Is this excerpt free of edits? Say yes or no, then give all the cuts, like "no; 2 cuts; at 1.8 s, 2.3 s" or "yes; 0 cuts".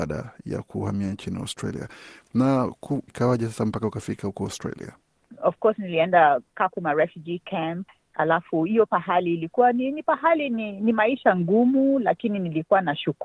no; 1 cut; at 3.1 s